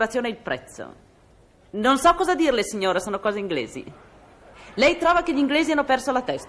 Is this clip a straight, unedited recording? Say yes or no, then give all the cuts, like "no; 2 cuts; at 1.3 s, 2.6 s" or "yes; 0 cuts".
yes; 0 cuts